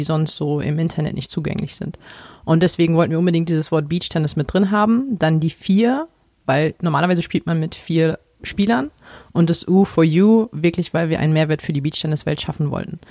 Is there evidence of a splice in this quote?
no; 0 cuts

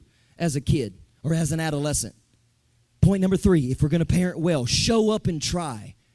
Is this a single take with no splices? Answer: no; 1 cut; at 2.9 s

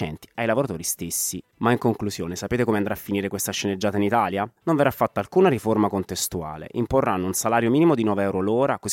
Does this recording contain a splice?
yes; 1 cut; at 1.5 s

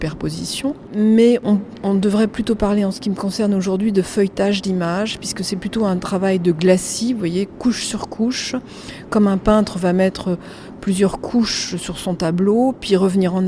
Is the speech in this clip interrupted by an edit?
no; 0 cuts

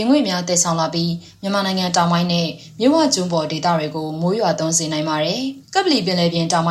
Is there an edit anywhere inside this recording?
yes; 1 cut; at 5.6 s

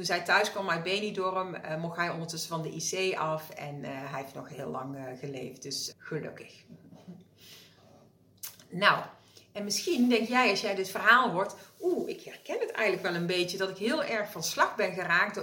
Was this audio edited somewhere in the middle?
yes; 1 cut; at 5.9 s

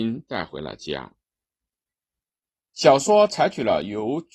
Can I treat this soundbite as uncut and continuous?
no; 1 cut; at 2.5 s

